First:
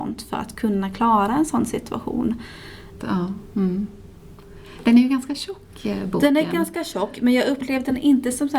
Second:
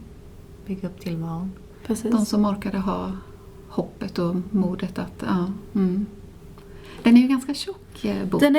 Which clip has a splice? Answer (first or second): first